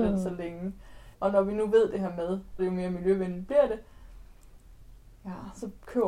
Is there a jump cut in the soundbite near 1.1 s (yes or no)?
yes